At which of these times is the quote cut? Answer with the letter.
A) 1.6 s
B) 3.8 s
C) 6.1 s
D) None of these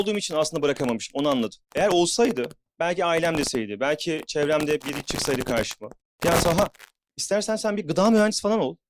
A